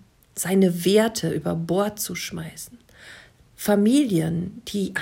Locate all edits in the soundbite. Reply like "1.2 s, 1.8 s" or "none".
none